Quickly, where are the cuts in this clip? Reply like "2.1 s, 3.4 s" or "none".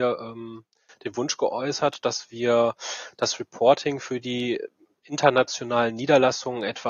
none